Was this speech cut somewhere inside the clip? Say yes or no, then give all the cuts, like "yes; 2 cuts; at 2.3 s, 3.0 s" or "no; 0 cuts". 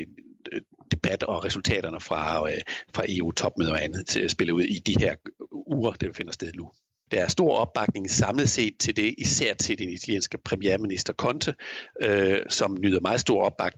yes; 1 cut; at 7.1 s